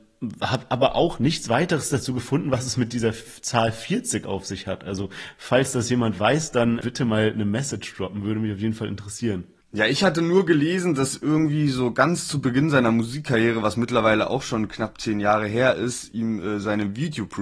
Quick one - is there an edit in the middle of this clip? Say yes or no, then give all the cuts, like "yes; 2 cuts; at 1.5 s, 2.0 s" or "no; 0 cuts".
yes; 1 cut; at 6.8 s